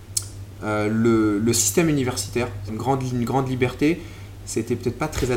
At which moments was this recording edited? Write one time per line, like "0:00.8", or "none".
0:02.7